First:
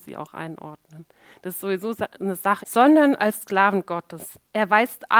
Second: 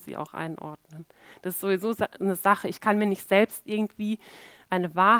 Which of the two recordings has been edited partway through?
first; 1 cut; at 2.6 s

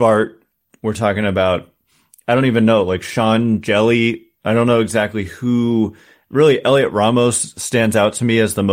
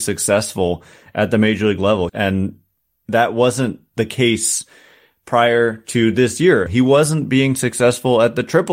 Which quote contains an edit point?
second; 2 cuts; at 2.1 s, 6.7 s

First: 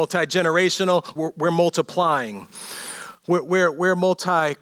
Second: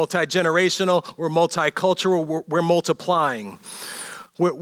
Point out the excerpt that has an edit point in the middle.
first; 1 cut; at 1.2 s

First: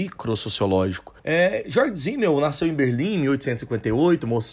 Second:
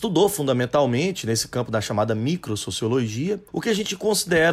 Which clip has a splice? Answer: first; 1 cut; at 1.2 s

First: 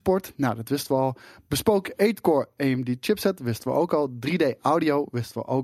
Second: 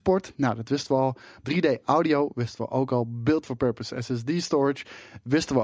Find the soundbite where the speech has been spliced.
second; 1 cut; at 1.4 s

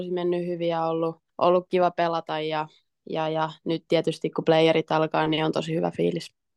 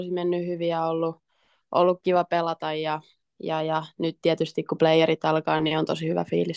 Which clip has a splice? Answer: first; 1 cut; at 1.3 s

